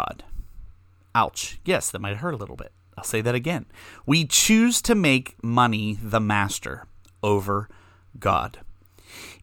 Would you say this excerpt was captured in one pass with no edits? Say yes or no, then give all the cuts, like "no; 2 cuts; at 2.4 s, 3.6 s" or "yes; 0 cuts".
yes; 0 cuts